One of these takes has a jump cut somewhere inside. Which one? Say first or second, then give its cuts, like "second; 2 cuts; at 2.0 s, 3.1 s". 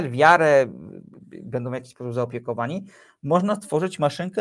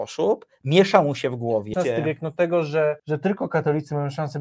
second; 2 cuts; at 1.7 s, 3.0 s